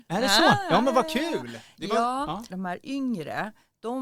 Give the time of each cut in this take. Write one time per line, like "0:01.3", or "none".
0:02.5

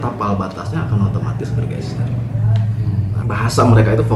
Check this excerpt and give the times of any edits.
0:03.2

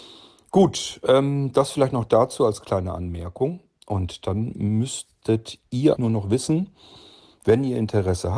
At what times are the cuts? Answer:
0:06.0

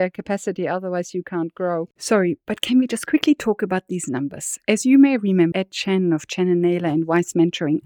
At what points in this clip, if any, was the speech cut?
0:05.5

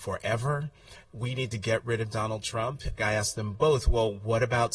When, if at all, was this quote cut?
0:01.0
0:03.0

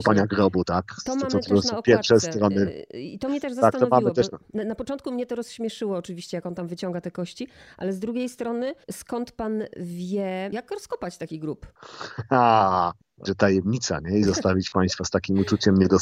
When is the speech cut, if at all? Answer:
0:08.8
0:13.2

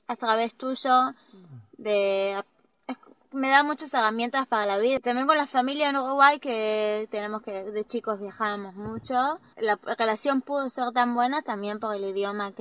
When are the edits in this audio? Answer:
none

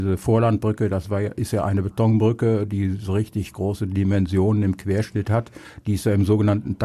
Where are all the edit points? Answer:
none

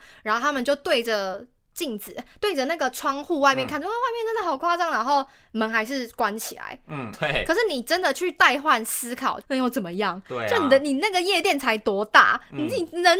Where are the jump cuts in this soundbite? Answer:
0:07.1
0:09.4

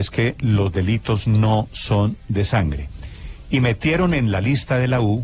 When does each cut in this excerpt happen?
none

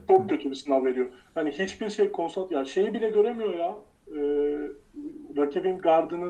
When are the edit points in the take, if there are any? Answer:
none

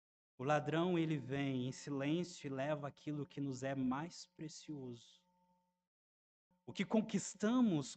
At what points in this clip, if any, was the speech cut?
0:06.5

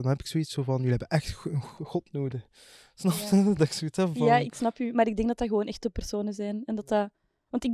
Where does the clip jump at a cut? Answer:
none

